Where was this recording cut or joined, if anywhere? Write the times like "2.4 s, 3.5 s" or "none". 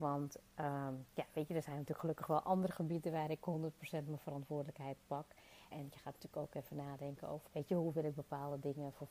5.7 s, 7.5 s